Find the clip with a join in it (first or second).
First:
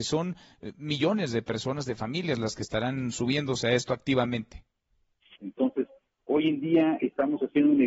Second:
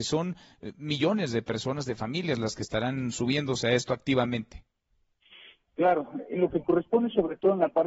first